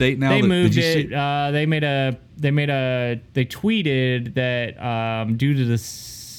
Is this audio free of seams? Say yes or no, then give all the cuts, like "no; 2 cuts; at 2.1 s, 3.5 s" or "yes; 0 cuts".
no; 1 cut; at 3.3 s